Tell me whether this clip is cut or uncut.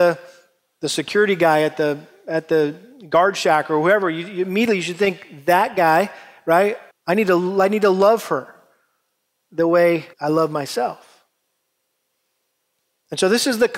cut